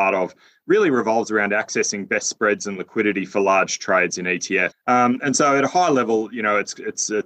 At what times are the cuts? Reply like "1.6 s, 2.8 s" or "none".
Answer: 4.7 s